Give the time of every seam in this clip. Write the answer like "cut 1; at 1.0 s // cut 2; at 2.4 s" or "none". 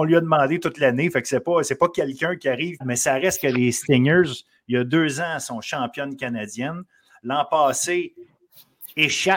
cut 1; at 2.8 s